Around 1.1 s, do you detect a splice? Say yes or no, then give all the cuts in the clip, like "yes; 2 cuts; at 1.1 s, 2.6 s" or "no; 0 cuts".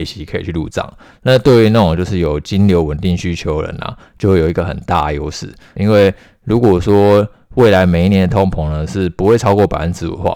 no; 1 cut; at 5.8 s